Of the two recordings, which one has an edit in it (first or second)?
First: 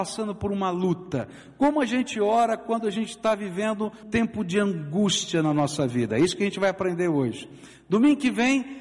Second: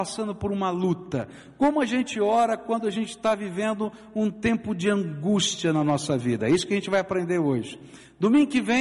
first